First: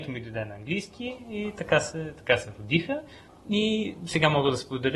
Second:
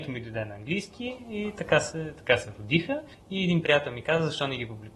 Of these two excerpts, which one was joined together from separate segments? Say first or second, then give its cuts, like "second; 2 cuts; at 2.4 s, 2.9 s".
second; 1 cut; at 3.1 s